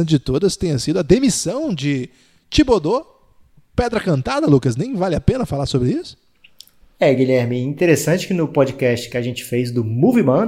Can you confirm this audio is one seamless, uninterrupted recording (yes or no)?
yes